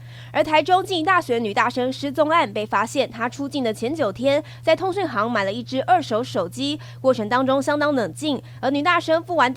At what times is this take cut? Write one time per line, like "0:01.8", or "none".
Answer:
none